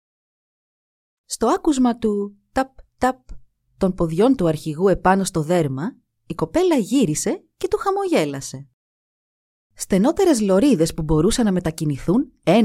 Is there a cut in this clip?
yes; 2 cuts; at 1.1 s, 9.6 s

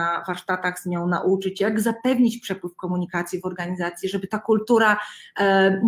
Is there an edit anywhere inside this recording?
no; 0 cuts

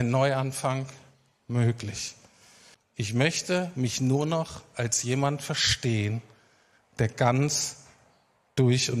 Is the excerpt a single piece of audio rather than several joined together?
no; 1 cut; at 2.7 s

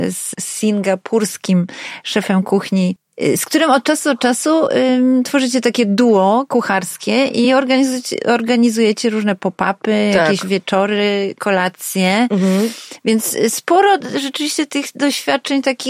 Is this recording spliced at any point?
no; 0 cuts

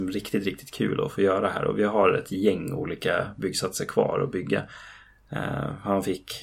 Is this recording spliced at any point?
no; 0 cuts

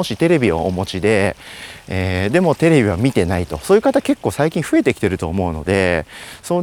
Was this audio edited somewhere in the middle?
no; 0 cuts

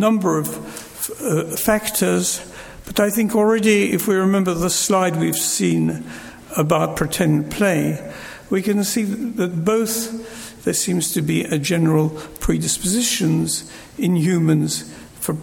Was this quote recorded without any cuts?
no; 1 cut; at 1.5 s

